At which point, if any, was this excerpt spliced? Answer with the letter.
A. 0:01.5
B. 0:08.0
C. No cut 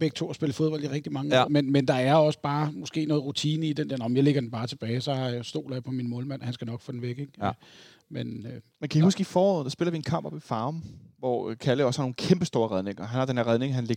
A